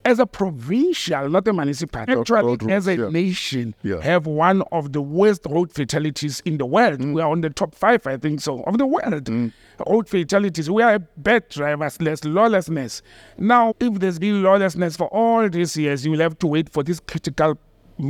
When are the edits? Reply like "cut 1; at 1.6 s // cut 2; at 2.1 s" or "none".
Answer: cut 1; at 2.1 s // cut 2; at 13.7 s